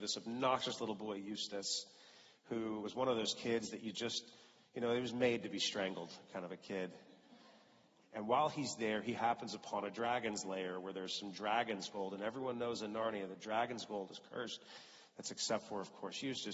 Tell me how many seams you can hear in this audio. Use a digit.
1